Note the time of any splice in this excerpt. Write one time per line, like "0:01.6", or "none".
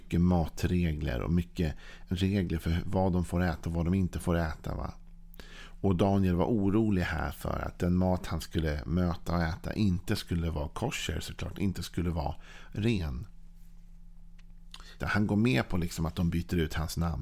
0:02.1
0:15.0